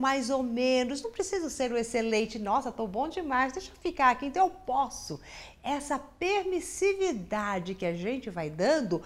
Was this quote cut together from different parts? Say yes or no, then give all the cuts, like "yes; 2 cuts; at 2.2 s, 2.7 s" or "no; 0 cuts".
no; 0 cuts